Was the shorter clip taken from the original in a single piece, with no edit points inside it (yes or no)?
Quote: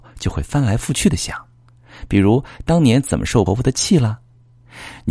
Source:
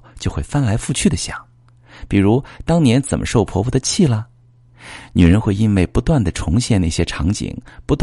no